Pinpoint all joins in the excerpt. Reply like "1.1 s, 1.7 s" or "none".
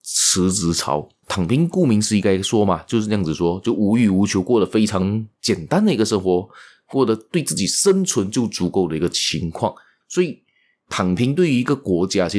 1.2 s, 10.0 s